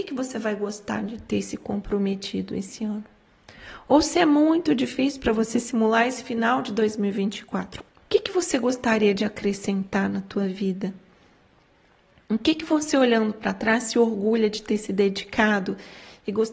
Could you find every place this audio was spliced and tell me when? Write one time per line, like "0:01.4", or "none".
0:07.9